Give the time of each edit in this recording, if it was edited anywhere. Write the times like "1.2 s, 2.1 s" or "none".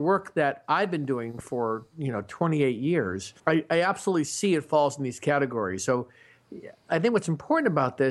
3.4 s